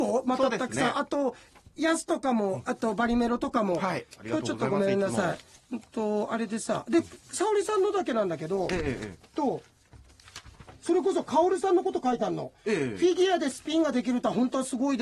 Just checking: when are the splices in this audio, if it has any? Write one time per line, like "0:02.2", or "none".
none

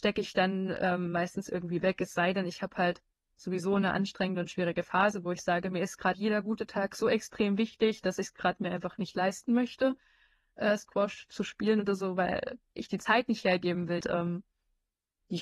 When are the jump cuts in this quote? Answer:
0:06.1
0:14.0

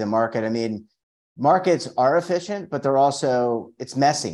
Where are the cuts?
none

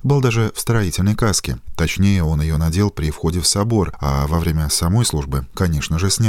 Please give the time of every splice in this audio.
none

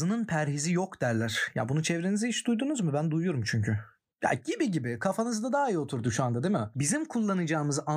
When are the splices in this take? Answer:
none

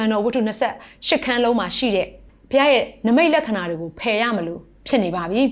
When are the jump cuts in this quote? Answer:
none

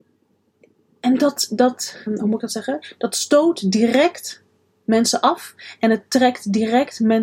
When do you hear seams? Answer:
0:02.1

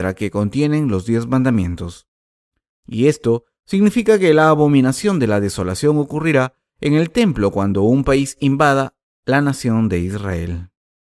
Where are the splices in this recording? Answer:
0:02.8

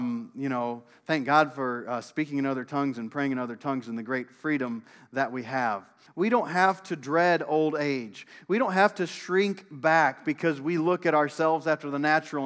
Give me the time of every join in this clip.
0:06.1

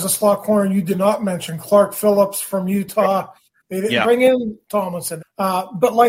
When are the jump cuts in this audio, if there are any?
0:03.6
0:05.2

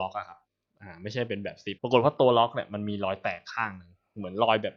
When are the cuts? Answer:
0:01.8

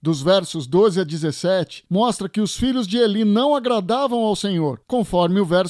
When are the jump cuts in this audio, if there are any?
none

